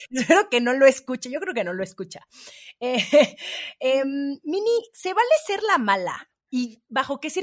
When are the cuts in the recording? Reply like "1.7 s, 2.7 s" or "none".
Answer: none

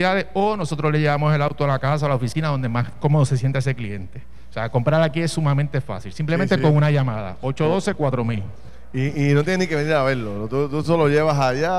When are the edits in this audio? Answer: none

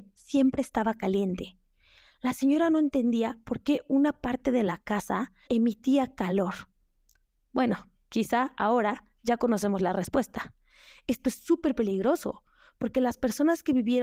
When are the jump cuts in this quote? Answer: 5.5 s

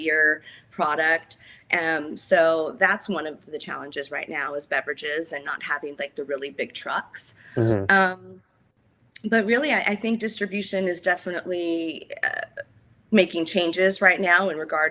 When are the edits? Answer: none

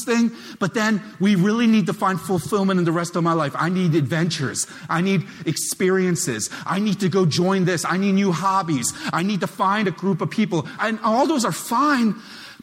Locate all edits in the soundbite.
10.8 s

